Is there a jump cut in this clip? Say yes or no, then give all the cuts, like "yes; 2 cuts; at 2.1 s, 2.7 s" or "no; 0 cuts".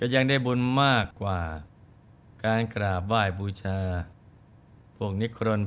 no; 0 cuts